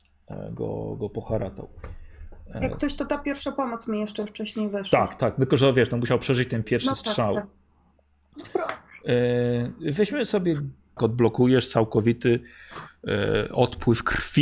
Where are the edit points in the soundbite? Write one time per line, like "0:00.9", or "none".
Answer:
0:06.6
0:11.0